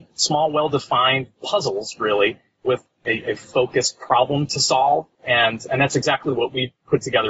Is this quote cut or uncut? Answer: cut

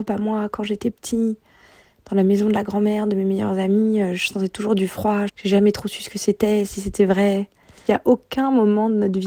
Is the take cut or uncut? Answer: cut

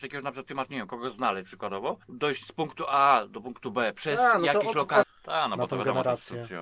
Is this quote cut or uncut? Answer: cut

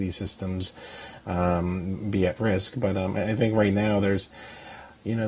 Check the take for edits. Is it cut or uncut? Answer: uncut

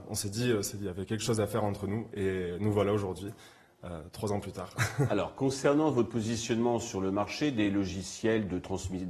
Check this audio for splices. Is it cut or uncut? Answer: uncut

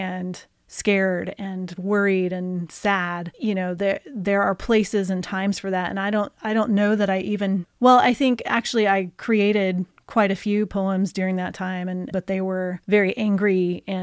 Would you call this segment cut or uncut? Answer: cut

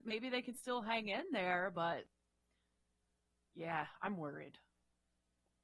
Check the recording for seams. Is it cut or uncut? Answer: uncut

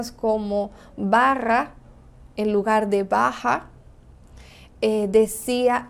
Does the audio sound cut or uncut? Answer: uncut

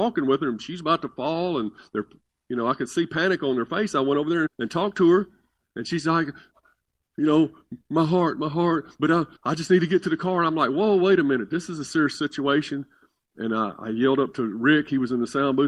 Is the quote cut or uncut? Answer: cut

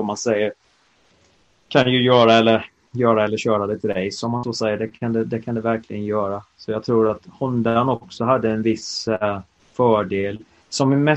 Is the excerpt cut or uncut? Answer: uncut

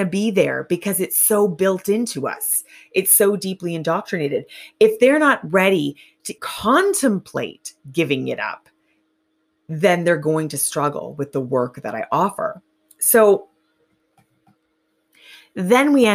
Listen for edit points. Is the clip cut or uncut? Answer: cut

